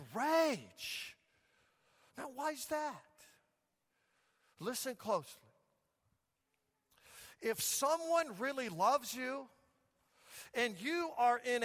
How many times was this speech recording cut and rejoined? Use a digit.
0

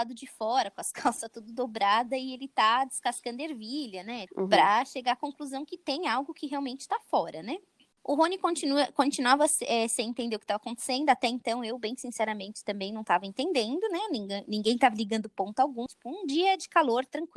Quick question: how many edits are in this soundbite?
2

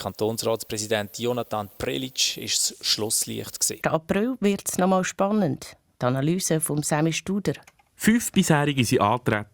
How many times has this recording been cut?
1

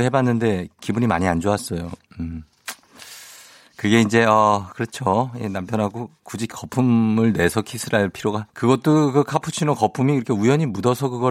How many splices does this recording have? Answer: 1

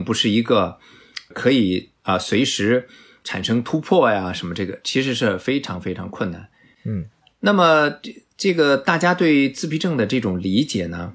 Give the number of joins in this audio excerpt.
0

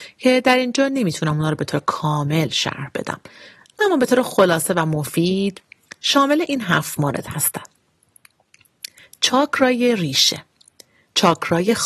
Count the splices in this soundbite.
0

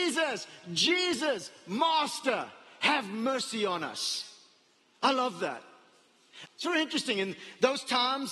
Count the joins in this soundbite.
1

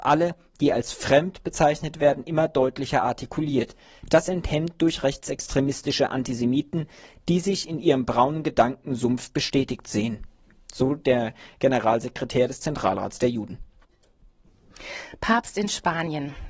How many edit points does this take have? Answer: 0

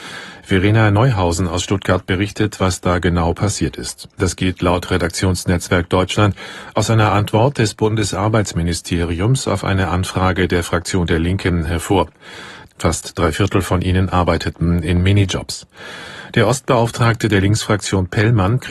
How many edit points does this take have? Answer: 2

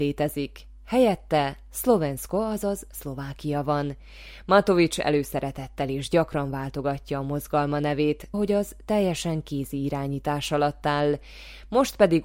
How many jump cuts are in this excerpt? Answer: 1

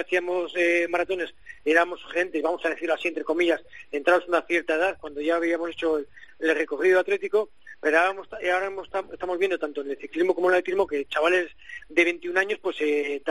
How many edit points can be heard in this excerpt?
0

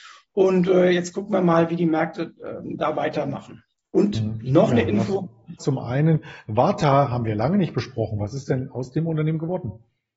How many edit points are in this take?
1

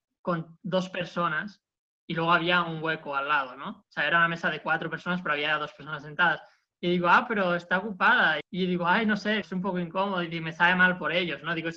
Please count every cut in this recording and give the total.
2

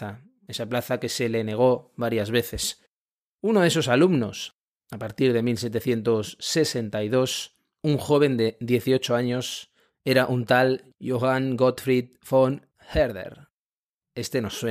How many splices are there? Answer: 0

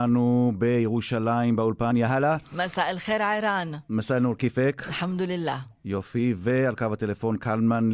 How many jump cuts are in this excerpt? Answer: 1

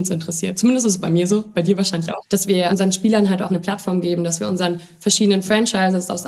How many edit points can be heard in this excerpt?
2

